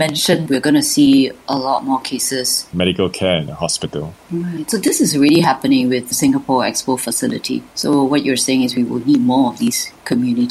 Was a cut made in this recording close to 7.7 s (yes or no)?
no